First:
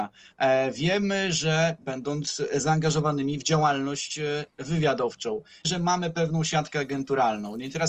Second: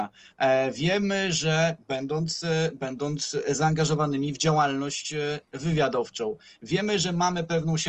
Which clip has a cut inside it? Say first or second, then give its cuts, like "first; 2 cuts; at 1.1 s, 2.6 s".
first; 2 cuts; at 1.8 s, 5.6 s